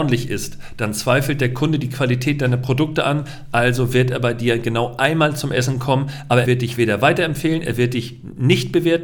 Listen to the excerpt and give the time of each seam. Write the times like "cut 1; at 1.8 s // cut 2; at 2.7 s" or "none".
cut 1; at 6.4 s